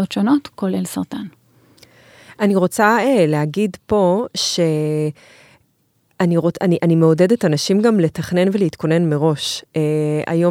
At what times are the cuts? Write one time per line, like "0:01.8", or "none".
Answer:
none